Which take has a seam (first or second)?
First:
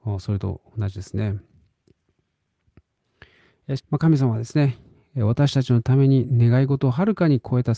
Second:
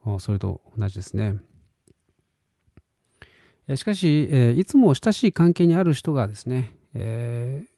first